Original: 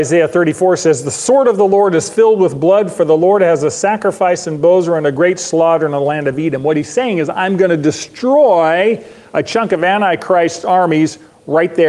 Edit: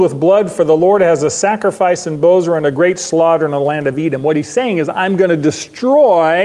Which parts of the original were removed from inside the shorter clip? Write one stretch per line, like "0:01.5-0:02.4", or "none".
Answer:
none